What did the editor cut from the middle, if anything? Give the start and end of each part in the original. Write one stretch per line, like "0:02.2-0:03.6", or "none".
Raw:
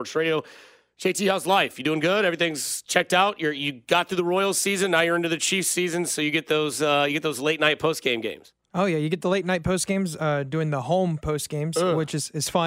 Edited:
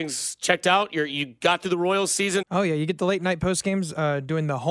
0:04.9-0:08.6